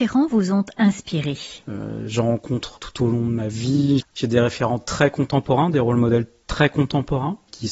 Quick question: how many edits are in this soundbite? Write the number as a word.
two